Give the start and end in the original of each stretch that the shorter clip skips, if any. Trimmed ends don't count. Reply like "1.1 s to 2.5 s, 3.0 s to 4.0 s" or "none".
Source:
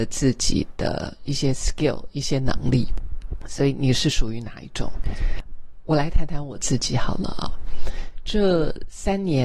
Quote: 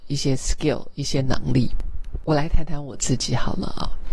3.4 s to 5.8 s